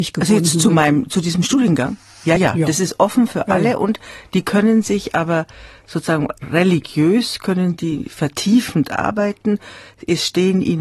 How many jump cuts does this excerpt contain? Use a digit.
0